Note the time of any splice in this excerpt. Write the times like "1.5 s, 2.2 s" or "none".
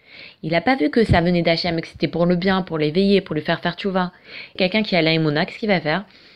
4.6 s